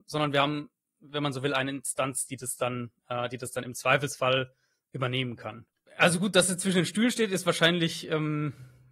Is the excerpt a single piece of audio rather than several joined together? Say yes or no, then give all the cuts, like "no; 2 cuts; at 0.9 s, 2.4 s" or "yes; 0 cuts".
no; 1 cut; at 5.9 s